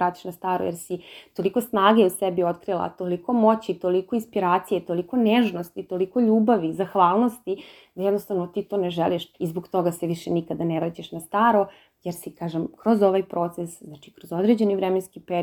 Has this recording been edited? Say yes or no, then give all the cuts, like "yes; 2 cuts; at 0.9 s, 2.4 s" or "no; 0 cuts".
yes; 1 cut; at 9.3 s